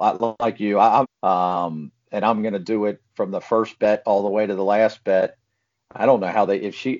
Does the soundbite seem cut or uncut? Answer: cut